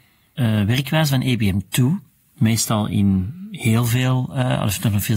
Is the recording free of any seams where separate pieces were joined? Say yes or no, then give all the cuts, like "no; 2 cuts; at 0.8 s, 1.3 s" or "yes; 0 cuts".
yes; 0 cuts